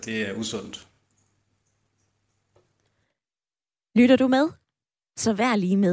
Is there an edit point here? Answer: no; 0 cuts

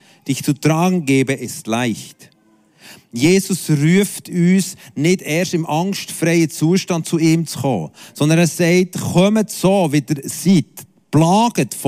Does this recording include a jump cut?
no; 0 cuts

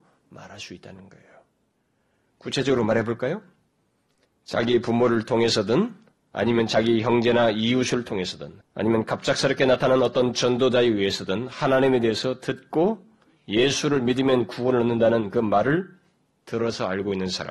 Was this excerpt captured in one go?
no; 1 cut; at 8.6 s

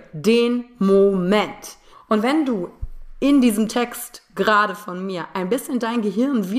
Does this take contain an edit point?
yes; 1 cut; at 1.9 s

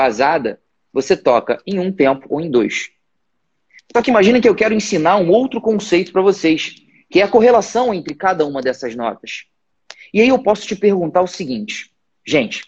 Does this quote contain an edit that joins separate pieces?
no; 0 cuts

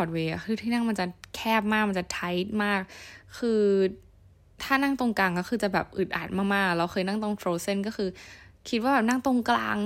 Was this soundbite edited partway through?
no; 0 cuts

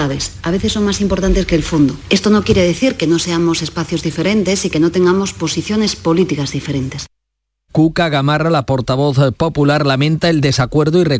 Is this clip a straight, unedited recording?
no; 1 cut; at 7.7 s

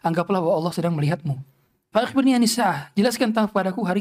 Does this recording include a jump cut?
yes; 1 cut; at 1.9 s

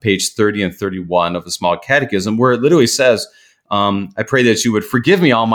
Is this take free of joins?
yes; 0 cuts

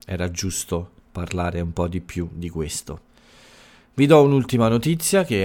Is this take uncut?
no; 1 cut; at 1.0 s

